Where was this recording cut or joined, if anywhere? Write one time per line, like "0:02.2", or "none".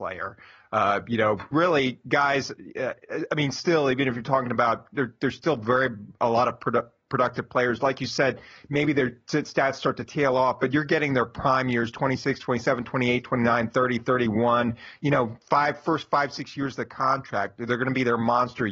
0:01.5